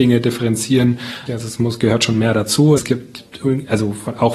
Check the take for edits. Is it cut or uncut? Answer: cut